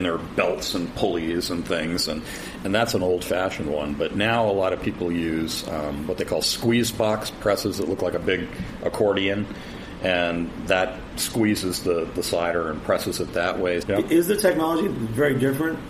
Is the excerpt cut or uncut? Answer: cut